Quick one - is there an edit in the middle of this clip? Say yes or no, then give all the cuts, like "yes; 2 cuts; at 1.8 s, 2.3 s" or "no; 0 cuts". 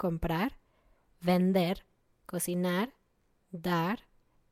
no; 0 cuts